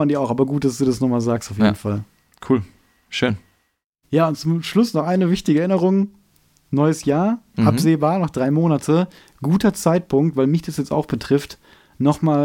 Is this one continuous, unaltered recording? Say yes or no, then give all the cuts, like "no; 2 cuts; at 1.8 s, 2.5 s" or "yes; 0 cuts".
no; 1 cut; at 7.5 s